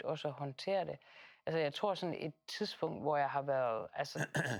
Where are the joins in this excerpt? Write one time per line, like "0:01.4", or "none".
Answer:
none